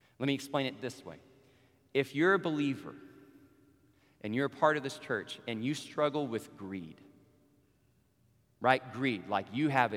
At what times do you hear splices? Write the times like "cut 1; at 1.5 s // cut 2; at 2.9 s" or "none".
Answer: none